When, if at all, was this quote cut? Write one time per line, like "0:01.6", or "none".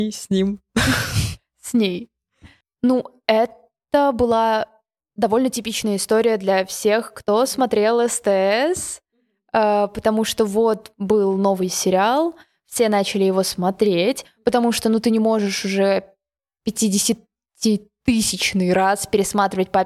none